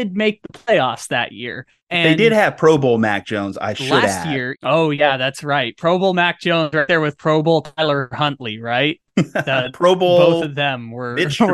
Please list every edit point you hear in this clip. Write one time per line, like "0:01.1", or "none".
none